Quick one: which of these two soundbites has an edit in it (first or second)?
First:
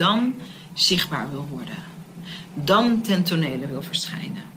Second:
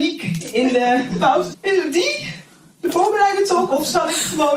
second